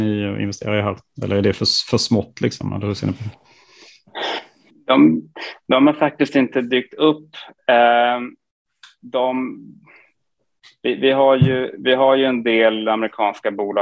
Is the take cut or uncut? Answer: uncut